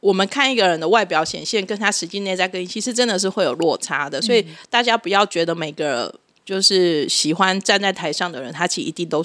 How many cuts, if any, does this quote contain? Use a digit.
0